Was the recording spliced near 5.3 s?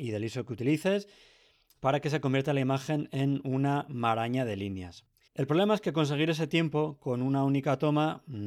yes; 1 cut; at 5.3 s

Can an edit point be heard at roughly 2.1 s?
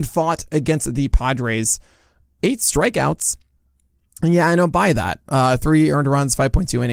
no; 0 cuts

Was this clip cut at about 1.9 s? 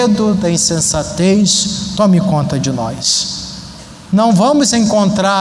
no; 1 cut; at 4.1 s

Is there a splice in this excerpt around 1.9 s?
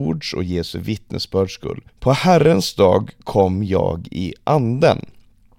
yes; 1 cut; at 1.9 s

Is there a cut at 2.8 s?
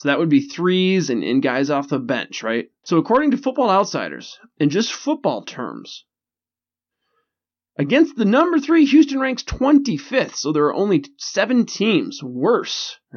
yes; 1 cut; at 2.8 s

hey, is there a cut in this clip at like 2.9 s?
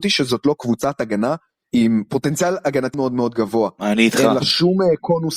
yes; 1 cut; at 2.9 s

